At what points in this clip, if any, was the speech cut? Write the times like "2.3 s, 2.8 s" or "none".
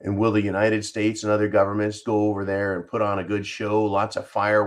2.0 s